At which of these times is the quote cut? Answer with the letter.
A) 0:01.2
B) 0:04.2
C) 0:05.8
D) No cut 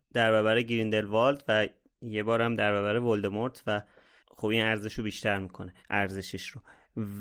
C